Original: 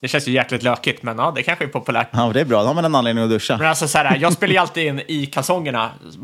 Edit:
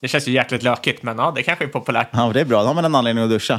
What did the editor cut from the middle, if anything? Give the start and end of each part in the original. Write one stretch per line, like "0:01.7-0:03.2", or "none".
none